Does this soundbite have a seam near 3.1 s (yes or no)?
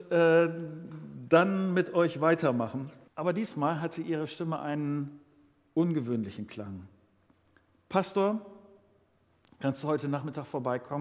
yes